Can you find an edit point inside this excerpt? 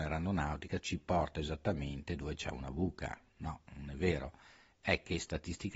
no; 0 cuts

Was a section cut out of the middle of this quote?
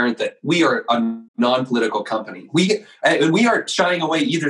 yes; 1 cut; at 1.3 s

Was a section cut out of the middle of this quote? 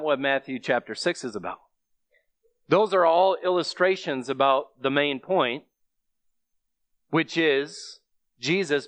no; 0 cuts

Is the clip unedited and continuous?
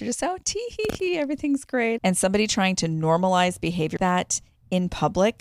no; 2 cuts; at 2.0 s, 4.0 s

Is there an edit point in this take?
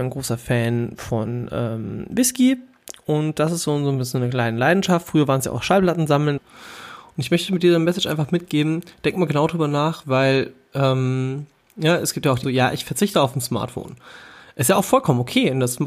yes; 3 cuts; at 6.4 s, 10.0 s, 12.4 s

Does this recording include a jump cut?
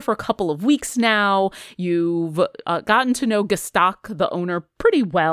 no; 0 cuts

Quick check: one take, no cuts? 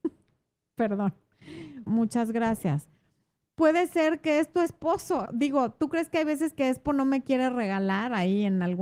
no; 2 cuts; at 1.9 s, 5.3 s

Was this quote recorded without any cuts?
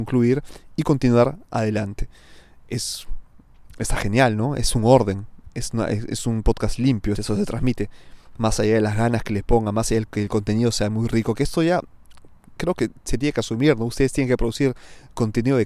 no; 1 cut; at 7.1 s

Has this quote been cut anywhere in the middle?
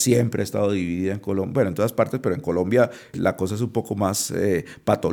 yes; 1 cut; at 3.1 s

